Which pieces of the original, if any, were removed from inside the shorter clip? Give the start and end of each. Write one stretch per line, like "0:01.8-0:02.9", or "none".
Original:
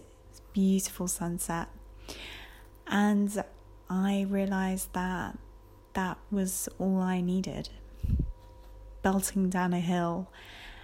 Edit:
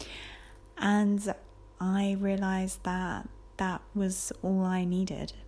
0:05.6-0:05.9